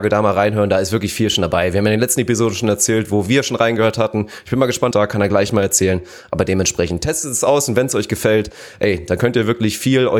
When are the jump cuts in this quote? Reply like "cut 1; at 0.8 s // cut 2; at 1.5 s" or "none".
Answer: cut 1; at 4.9 s